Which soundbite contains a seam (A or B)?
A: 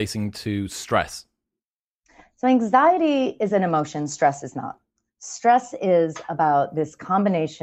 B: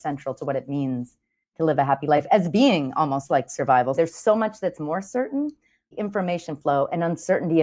B